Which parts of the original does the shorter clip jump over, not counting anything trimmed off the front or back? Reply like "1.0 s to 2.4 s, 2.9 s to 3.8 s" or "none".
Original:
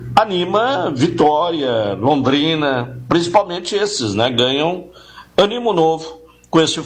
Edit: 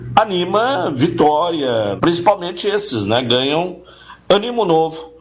2.0 s to 3.0 s